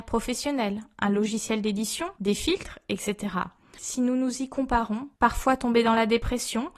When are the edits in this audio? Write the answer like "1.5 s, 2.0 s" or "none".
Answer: 2.2 s, 5.1 s